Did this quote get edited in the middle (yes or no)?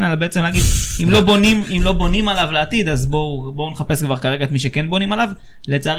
no